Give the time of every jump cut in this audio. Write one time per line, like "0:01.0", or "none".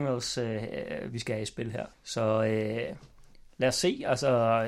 0:01.9